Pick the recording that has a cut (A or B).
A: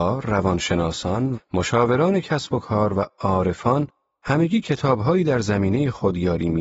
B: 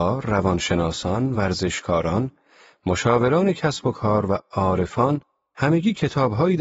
A